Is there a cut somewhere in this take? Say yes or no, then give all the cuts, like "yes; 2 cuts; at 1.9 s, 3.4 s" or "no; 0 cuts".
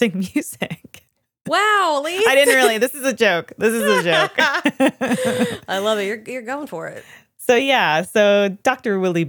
no; 0 cuts